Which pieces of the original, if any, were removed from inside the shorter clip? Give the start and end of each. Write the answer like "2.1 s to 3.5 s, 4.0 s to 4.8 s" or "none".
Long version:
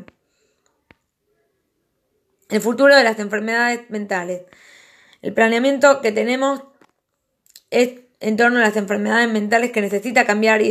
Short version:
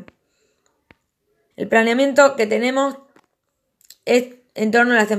1.5 s to 5.2 s